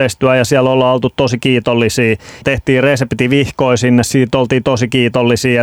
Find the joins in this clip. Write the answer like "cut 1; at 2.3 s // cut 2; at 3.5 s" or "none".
cut 1; at 2.4 s